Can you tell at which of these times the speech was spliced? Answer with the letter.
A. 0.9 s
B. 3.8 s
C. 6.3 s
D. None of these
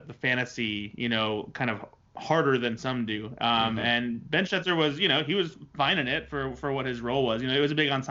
D